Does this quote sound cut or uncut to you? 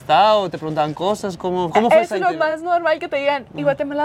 uncut